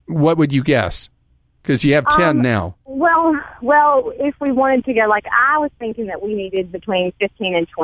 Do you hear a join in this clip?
no; 0 cuts

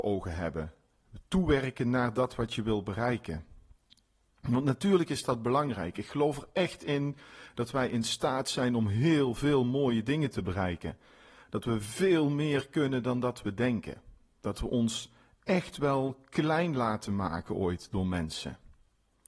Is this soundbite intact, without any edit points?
yes; 0 cuts

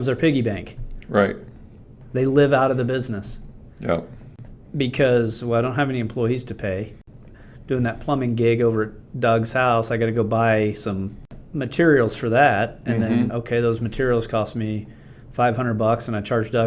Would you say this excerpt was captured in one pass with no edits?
no; 1 cut; at 13.3 s

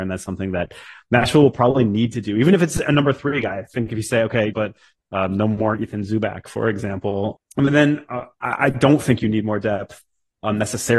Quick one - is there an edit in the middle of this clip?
yes; 2 cuts; at 4.5 s, 7.4 s

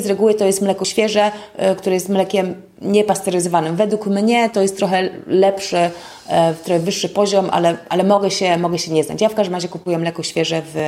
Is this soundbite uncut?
yes; 0 cuts

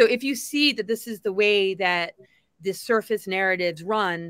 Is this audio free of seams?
yes; 0 cuts

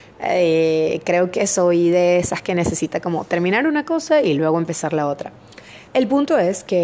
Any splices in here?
no; 0 cuts

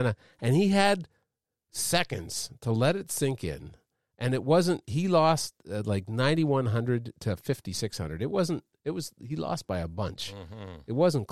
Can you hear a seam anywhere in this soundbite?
no; 0 cuts

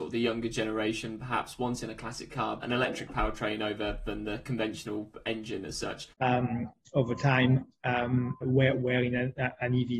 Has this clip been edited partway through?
yes; 3 cuts; at 2.6 s, 6.1 s, 8.4 s

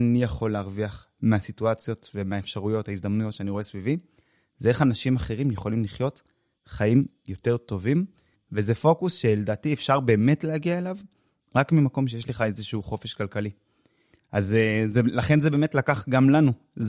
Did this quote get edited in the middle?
no; 0 cuts

